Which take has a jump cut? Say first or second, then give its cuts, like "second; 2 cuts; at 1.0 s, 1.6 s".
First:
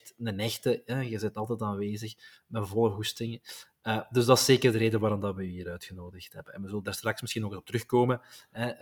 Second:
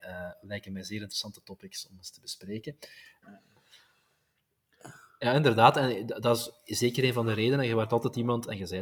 second; 1 cut; at 3.2 s